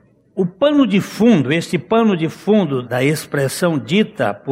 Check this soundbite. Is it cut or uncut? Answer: cut